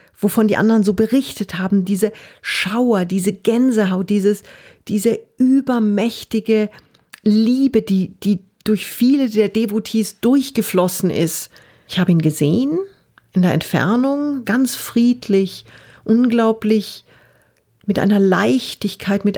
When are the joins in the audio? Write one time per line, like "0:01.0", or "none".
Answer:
0:11.9
0:14.4